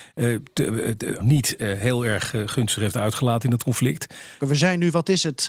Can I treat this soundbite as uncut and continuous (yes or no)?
no